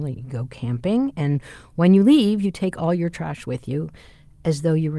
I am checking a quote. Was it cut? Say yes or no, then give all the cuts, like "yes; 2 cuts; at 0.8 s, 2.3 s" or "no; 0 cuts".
no; 0 cuts